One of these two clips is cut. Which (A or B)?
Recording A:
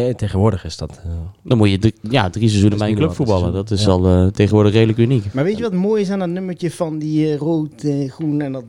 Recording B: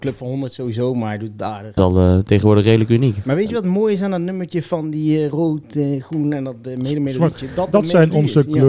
B